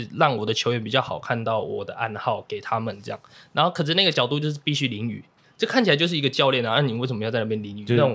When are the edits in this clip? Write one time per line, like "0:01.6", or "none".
0:05.4